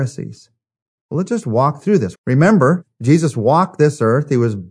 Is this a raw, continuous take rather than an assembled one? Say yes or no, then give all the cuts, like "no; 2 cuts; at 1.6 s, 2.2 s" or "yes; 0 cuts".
no; 2 cuts; at 1.0 s, 2.1 s